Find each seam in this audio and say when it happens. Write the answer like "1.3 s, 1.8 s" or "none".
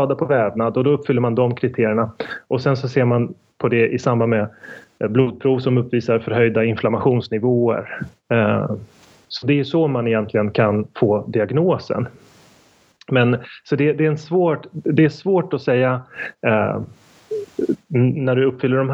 none